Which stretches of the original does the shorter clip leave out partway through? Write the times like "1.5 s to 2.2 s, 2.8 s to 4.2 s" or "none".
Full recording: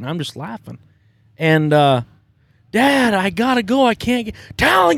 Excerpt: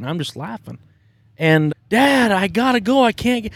1.7 s to 2.5 s